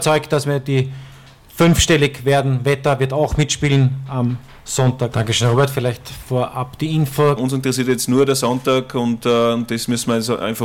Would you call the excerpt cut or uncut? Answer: cut